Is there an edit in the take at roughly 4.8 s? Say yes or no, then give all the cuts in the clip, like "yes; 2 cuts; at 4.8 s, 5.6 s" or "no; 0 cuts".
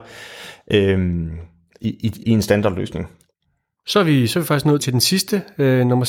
yes; 2 cuts; at 2.2 s, 4.8 s